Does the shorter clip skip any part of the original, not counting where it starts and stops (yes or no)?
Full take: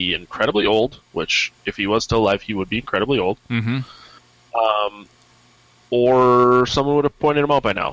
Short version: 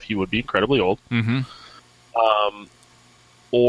no